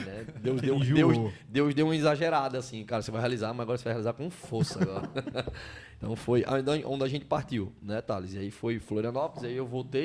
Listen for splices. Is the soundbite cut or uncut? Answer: uncut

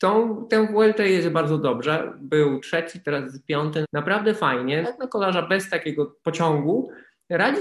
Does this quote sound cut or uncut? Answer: cut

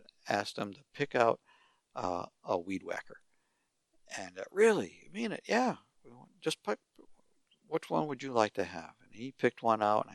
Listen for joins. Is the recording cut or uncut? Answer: uncut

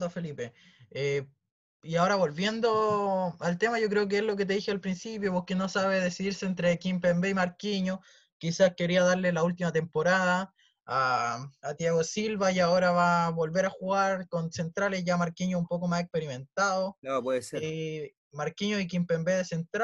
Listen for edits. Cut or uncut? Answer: uncut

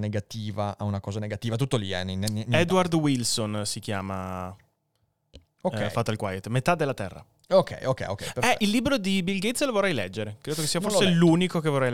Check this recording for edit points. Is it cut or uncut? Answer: uncut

